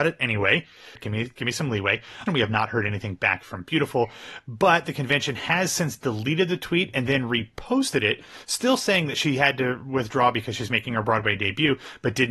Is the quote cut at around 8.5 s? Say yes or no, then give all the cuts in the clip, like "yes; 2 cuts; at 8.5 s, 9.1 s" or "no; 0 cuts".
no; 2 cuts; at 1.0 s, 2.3 s